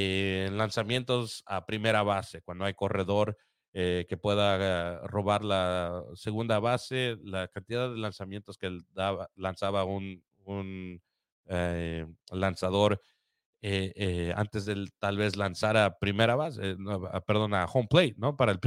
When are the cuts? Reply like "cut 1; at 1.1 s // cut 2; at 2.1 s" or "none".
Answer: none